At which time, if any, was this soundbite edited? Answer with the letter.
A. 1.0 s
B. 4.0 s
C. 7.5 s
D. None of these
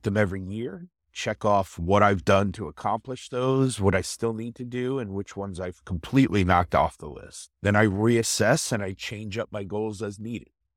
C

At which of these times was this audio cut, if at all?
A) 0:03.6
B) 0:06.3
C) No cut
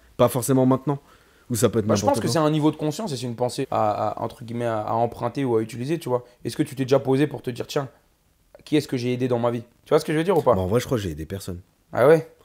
A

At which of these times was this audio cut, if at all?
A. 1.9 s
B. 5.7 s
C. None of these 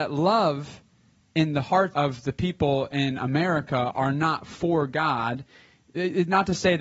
A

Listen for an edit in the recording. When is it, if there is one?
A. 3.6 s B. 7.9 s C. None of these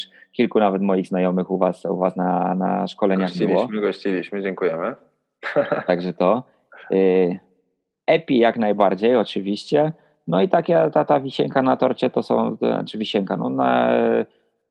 C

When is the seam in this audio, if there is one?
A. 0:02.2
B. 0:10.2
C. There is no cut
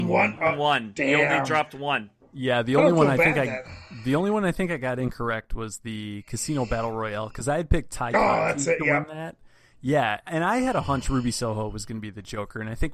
B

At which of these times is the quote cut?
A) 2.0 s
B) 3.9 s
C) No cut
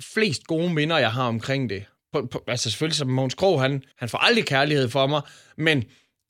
B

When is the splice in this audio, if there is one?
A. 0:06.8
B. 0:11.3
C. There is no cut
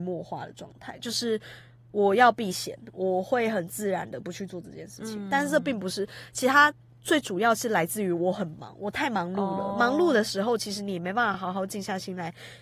C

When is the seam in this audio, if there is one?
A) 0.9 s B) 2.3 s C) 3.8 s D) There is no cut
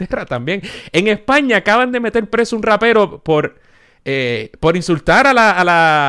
D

